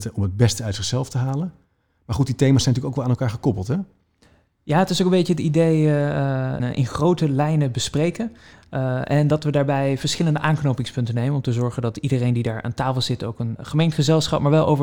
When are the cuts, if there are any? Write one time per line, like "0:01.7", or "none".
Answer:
0:06.6
0:13.6